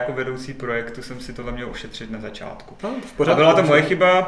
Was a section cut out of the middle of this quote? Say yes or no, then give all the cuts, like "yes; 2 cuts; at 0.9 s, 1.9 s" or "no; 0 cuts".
yes; 1 cut; at 2.8 s